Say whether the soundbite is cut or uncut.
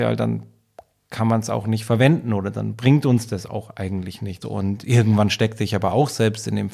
cut